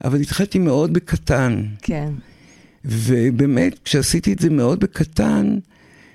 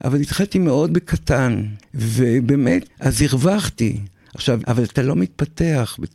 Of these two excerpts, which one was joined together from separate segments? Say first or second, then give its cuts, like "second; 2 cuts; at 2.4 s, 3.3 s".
second; 3 cuts; at 1.8 s, 2.9 s, 4.6 s